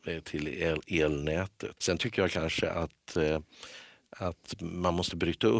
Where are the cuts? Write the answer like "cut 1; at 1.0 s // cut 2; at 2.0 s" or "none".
cut 1; at 1.8 s